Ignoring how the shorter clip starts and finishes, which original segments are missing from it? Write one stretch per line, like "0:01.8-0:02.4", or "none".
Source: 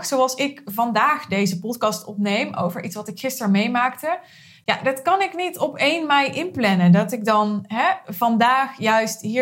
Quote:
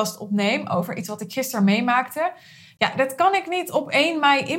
none